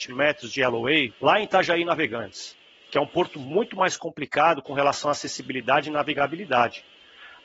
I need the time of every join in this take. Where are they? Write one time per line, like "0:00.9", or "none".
0:01.1